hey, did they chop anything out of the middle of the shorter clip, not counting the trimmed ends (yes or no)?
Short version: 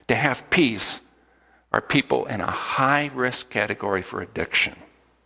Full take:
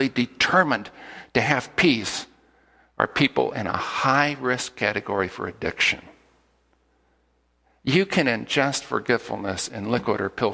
no